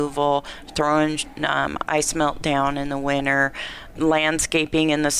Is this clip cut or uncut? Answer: cut